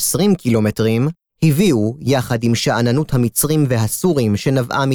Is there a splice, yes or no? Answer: no